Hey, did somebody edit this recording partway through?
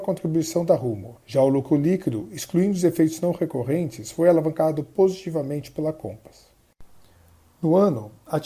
yes; 1 cut; at 1.2 s

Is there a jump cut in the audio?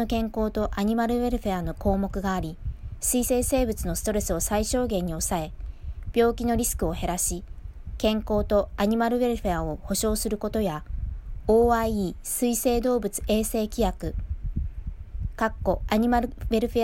no; 0 cuts

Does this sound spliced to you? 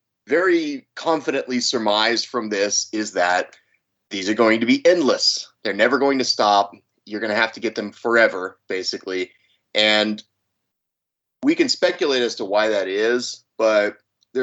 no; 0 cuts

